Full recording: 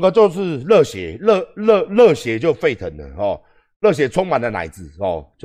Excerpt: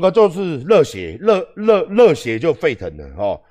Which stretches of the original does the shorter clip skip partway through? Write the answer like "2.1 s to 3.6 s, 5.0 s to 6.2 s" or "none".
none